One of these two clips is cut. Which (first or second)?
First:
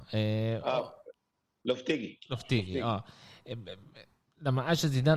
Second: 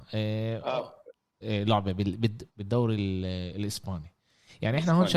second